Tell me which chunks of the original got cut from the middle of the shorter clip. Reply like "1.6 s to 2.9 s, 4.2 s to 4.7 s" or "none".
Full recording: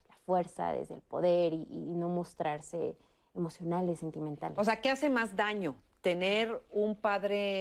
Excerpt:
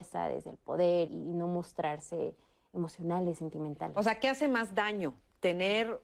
1.5 s to 1.7 s